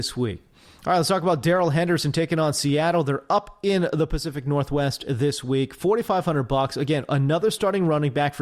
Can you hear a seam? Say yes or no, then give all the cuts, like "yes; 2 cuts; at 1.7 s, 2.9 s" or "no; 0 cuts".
no; 0 cuts